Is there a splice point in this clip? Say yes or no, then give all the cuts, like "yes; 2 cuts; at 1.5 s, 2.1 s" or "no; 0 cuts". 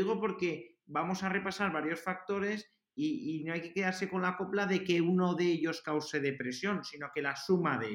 no; 0 cuts